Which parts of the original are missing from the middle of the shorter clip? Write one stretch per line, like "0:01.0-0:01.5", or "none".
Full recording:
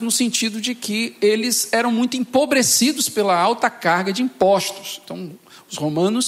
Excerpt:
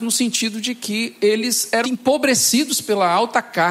0:01.8-0:02.1

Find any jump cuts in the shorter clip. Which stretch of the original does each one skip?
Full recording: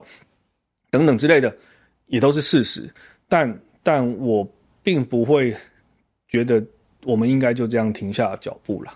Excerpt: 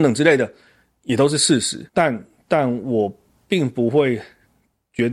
0:02.9-0:03.2

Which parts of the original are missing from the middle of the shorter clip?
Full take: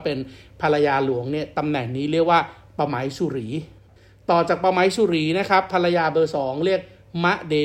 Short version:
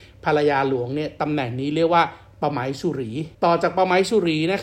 0:03.7-0:04.2

